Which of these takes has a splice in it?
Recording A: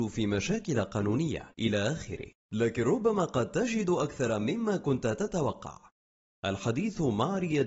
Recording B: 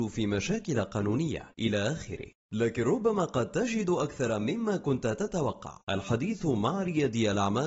B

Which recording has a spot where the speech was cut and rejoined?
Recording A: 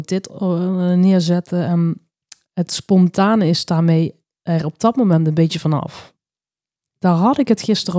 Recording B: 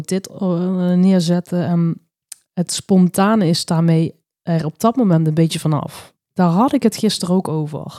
B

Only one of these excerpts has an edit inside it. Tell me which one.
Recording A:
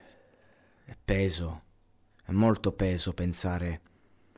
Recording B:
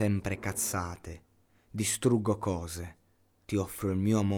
B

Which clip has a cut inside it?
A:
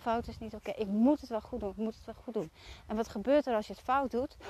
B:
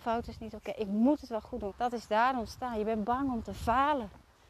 B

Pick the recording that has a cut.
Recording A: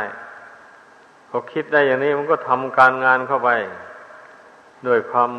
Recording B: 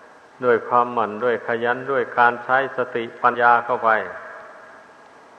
B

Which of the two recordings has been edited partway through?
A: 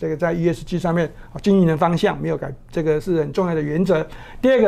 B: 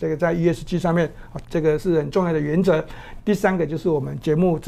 B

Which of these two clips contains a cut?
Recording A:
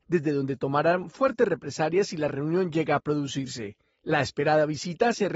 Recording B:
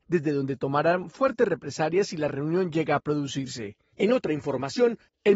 B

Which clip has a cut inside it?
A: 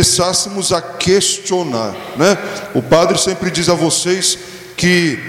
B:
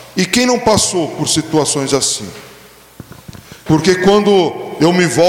B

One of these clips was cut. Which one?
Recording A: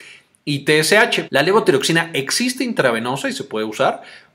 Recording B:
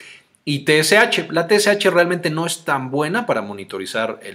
A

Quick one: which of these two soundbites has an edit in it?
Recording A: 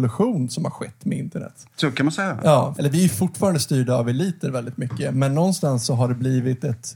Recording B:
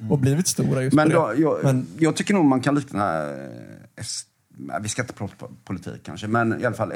A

